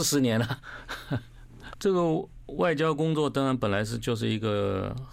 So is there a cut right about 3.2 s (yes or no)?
no